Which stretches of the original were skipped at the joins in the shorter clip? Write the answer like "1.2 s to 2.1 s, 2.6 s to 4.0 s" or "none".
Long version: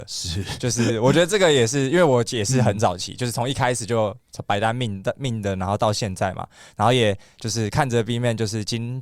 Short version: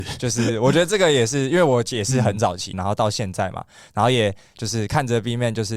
3.1 s to 5.6 s